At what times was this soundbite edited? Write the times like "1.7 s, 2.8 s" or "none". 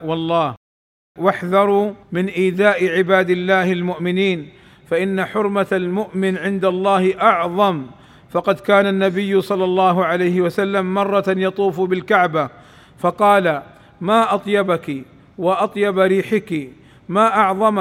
2.0 s